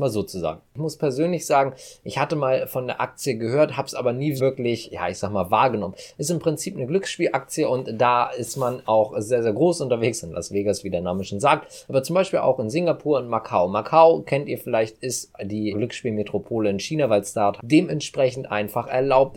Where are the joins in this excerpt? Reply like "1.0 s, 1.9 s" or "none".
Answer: 4.4 s, 15.7 s, 17.6 s